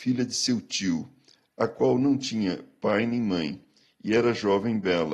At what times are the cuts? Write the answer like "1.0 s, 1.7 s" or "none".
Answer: none